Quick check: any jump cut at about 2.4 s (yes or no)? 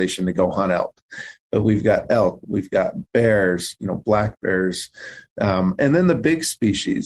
yes